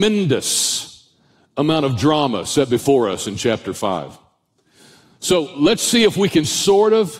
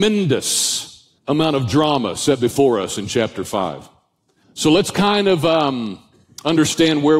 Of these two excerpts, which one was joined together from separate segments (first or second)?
second